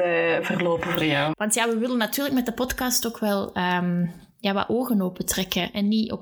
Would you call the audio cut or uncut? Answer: cut